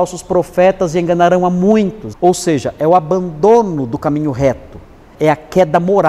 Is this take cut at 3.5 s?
no; 2 cuts; at 2.1 s, 5.2 s

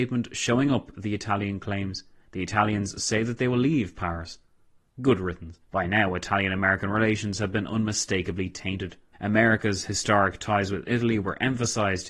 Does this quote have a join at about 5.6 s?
yes; 2 cuts; at 5.6 s, 9.1 s

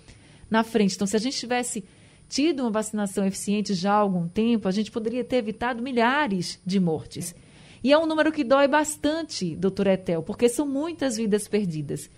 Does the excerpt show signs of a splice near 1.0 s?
no; 0 cuts

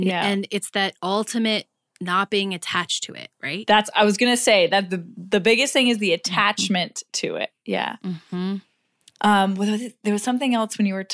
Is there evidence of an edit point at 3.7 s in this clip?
no; 1 cut; at 9.2 s

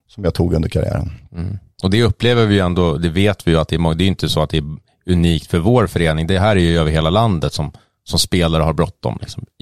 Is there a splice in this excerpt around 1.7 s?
no; 0 cuts

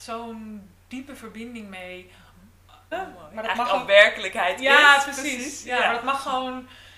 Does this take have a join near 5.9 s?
no; 1 cut; at 2.9 s

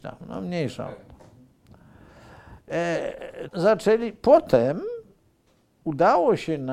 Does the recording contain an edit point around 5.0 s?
no; 1 cut; at 3.5 s

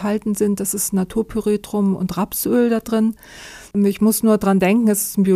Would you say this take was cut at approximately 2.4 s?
no; 1 cut; at 3.7 s

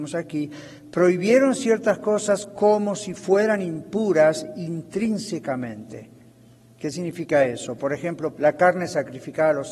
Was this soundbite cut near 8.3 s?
yes; 1 cut; at 8.3 s

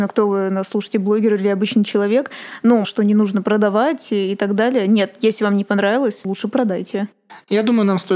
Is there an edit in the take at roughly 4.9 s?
no; 2 cuts; at 2.8 s, 6.2 s

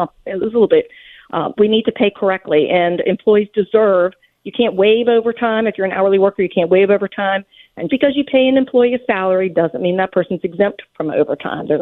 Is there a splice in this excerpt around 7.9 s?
yes; 2 cuts; at 1.6 s, 7.9 s

